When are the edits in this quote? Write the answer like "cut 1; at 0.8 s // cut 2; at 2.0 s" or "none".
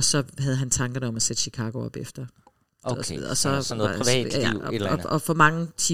cut 1; at 2.8 s